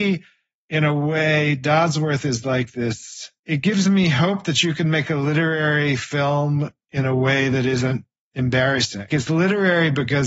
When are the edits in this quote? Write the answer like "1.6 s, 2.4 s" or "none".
3.4 s, 9.1 s